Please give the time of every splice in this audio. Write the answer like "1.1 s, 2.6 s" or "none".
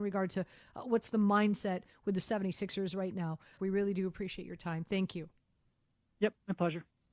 3.6 s